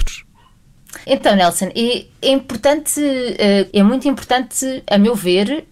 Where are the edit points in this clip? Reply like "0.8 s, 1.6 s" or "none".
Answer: 1.0 s, 3.7 s